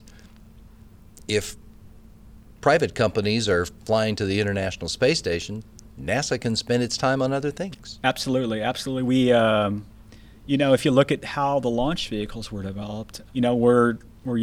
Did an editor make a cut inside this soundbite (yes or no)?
yes